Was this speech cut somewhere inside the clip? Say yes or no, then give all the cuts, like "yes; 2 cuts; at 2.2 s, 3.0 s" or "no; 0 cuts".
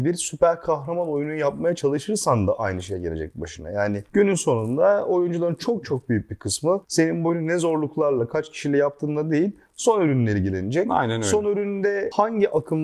no; 0 cuts